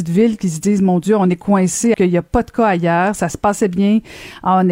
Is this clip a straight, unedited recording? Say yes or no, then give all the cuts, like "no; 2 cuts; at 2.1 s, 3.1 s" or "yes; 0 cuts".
no; 1 cut; at 1.9 s